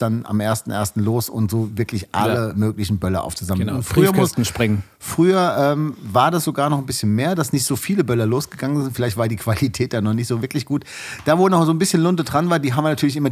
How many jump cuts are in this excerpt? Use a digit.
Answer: 0